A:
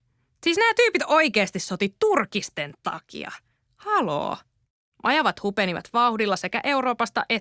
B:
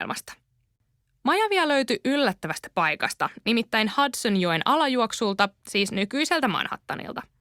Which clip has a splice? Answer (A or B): A